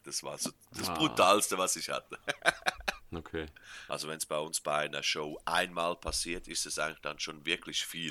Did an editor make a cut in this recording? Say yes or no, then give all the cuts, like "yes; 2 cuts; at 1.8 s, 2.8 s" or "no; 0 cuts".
yes; 1 cut; at 3.9 s